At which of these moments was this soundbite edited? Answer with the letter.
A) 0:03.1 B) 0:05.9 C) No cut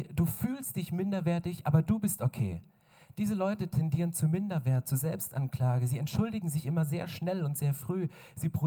C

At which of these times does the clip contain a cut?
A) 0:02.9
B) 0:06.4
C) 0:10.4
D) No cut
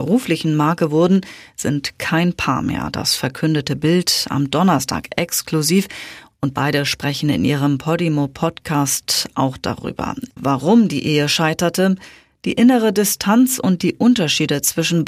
C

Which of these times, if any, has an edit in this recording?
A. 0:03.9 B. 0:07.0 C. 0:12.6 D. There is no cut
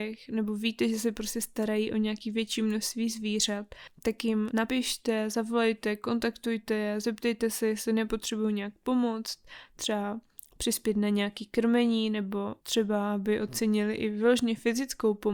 C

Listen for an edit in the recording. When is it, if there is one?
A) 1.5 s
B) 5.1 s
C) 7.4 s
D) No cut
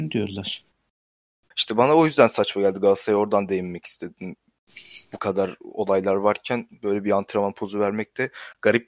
A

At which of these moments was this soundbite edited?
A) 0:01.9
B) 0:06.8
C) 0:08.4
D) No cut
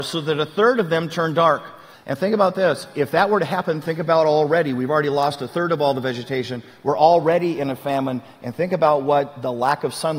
A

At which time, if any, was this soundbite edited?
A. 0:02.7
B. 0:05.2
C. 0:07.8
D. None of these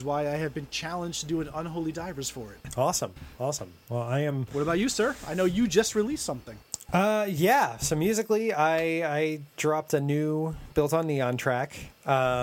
D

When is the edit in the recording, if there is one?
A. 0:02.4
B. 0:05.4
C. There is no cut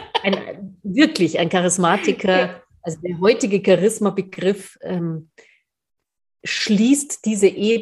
C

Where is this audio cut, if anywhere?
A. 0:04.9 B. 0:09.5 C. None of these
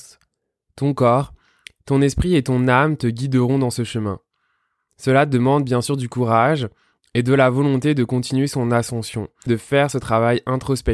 B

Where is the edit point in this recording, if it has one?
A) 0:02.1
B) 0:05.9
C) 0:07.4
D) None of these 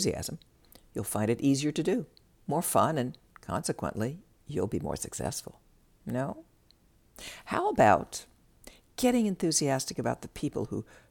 B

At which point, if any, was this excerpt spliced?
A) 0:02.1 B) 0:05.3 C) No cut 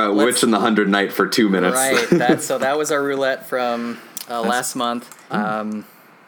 B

